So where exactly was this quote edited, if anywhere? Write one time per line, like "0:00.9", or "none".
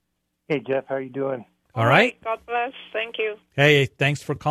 0:01.7